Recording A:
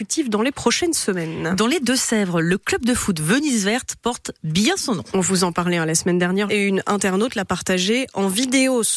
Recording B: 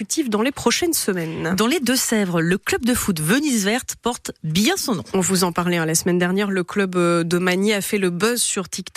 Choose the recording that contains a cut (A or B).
A